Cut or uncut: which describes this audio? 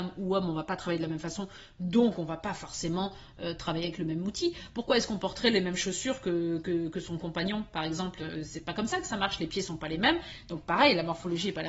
uncut